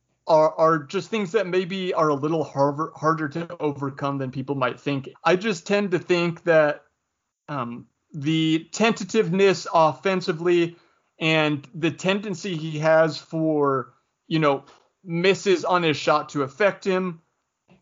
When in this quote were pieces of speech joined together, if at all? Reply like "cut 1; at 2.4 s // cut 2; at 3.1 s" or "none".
cut 1; at 5.1 s

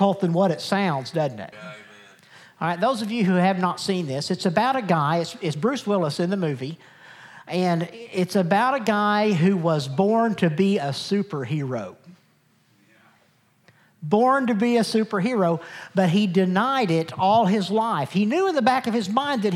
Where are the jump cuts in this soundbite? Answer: cut 1; at 1.5 s

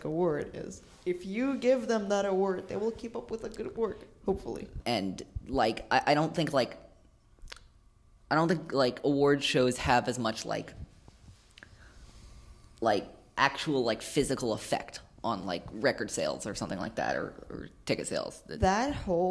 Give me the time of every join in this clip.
cut 1; at 4.8 s

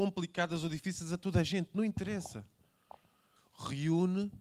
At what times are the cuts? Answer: none

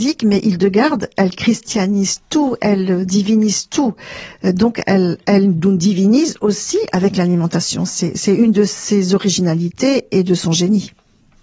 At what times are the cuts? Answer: none

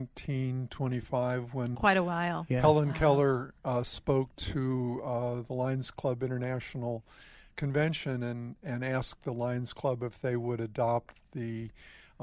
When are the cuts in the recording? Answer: none

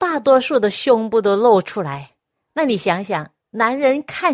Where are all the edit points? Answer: none

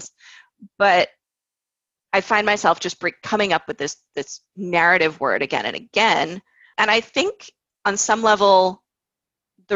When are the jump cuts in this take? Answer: cut 1; at 6.7 s

